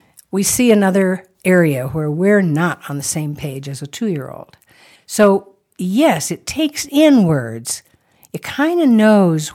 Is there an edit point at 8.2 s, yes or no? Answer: no